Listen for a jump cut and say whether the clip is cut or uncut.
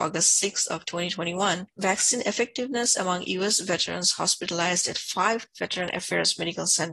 uncut